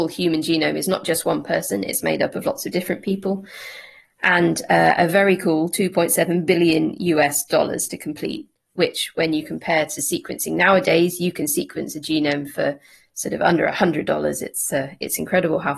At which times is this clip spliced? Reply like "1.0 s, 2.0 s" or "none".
none